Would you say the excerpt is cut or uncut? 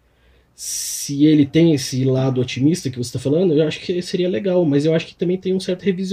uncut